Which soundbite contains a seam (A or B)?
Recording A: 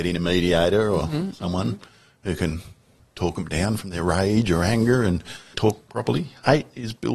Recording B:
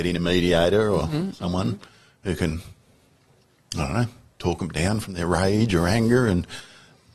A